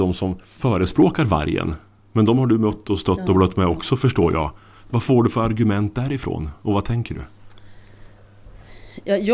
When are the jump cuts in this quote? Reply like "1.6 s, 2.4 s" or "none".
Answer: none